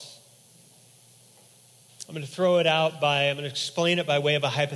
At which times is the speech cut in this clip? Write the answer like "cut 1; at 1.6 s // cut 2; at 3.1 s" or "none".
none